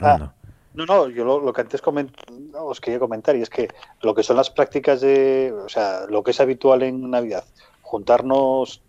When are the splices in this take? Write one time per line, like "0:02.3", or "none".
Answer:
none